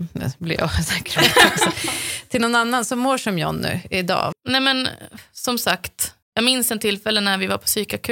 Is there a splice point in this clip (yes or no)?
yes